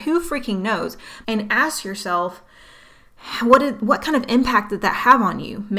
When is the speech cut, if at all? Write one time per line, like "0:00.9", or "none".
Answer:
0:01.2